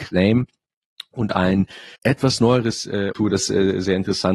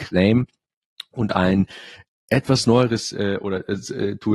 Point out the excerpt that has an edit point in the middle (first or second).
first